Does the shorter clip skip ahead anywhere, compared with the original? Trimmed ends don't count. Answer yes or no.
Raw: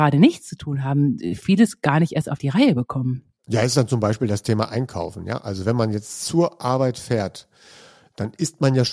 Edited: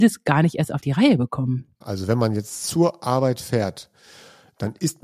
yes